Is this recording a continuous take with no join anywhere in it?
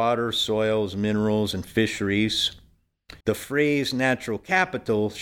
no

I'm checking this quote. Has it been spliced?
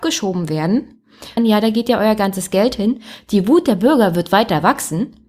yes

